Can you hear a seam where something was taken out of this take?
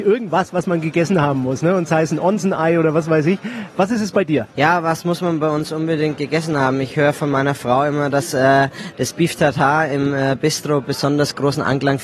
yes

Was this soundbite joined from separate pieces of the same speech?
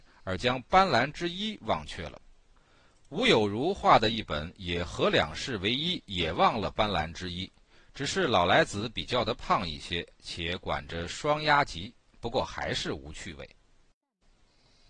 no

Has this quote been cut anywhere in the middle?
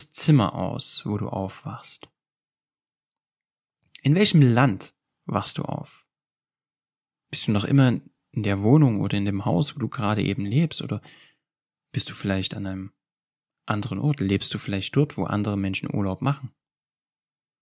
no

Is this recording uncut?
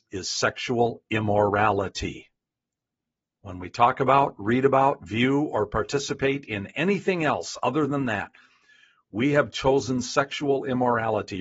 yes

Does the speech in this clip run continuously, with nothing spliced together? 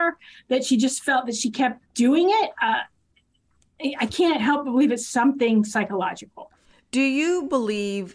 no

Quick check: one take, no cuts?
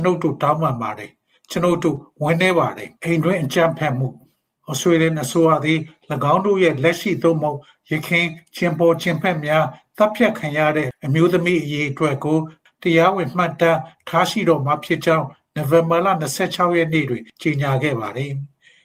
no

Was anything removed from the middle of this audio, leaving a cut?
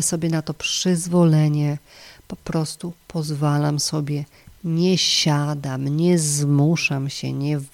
no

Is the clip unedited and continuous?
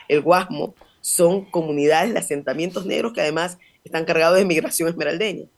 yes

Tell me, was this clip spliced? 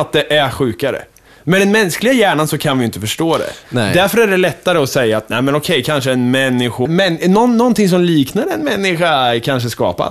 yes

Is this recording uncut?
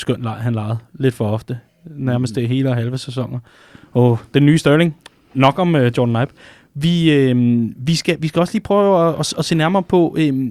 yes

